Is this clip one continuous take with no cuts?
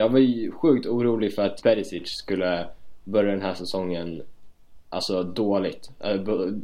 no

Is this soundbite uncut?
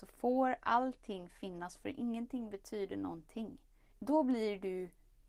no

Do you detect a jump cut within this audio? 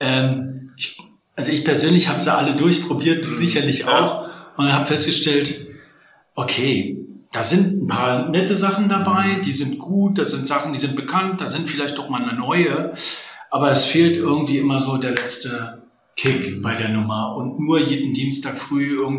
no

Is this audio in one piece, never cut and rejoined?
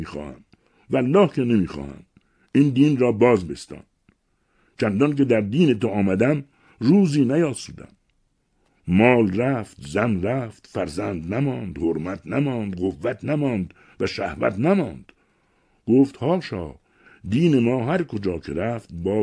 yes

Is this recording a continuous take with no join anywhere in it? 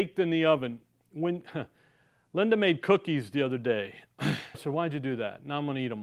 no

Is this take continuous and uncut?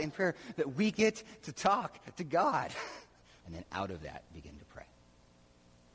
no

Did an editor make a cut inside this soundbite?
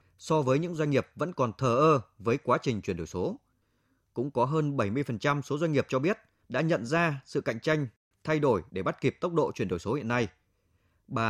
no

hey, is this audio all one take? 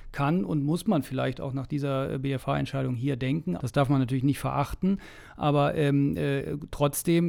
no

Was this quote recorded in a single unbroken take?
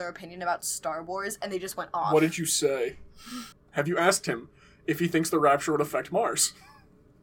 no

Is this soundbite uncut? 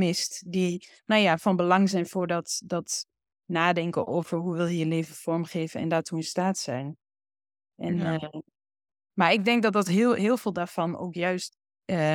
yes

